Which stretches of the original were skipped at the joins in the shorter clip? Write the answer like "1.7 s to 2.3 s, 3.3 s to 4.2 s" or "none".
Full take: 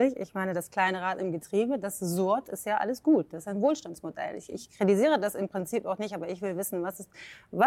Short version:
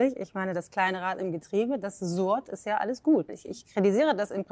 3.3 s to 4.3 s